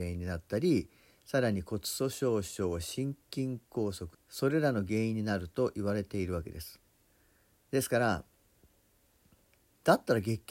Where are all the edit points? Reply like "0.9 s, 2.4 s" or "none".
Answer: 4.1 s, 7.7 s